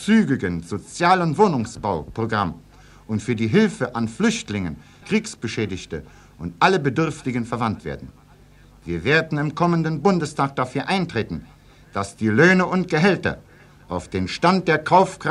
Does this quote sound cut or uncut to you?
cut